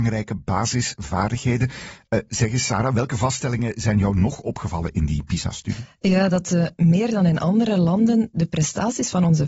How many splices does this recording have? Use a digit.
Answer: 0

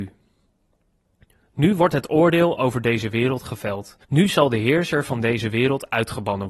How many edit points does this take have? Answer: 1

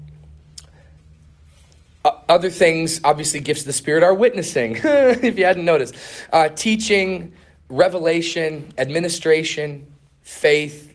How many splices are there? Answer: 0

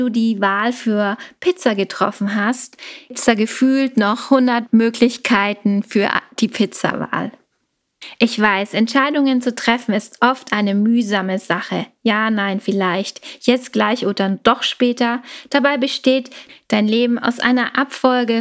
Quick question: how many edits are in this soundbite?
0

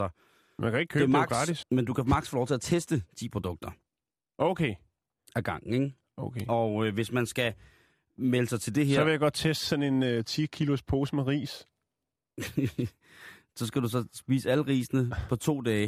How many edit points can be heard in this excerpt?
1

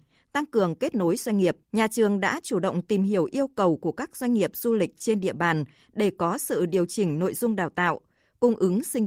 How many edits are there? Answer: 1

